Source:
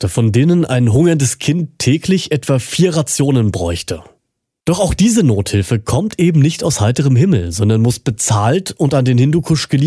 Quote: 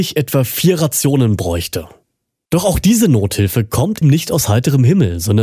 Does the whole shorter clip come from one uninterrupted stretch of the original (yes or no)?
no